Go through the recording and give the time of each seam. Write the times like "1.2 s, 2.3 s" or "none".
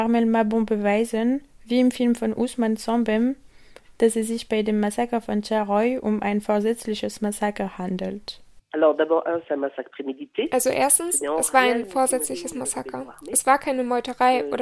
none